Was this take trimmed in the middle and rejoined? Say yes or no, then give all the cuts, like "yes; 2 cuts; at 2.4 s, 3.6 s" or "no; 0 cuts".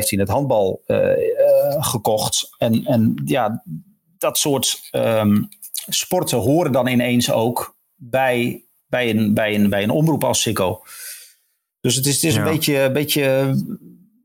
no; 0 cuts